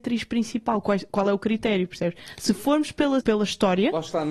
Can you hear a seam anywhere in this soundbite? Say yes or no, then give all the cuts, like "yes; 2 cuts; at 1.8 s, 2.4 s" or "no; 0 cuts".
yes; 1 cut; at 3.2 s